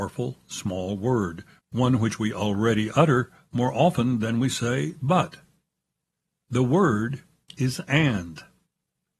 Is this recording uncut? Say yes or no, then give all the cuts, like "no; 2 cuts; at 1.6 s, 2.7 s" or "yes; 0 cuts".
yes; 0 cuts